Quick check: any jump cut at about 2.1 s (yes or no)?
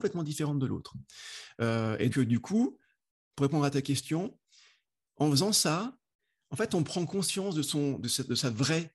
yes